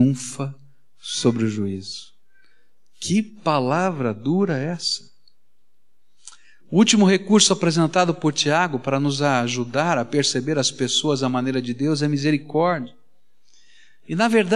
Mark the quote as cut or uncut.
uncut